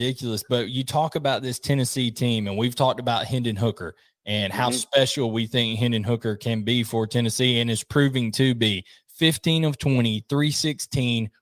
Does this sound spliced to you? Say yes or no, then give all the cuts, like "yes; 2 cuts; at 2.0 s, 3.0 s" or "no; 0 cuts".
no; 0 cuts